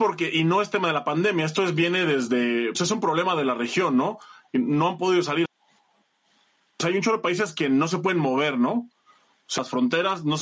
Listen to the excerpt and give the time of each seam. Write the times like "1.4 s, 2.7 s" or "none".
2.7 s, 5.4 s